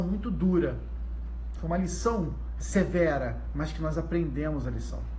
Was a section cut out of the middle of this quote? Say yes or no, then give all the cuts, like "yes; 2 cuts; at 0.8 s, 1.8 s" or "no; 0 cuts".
yes; 1 cut; at 2.6 s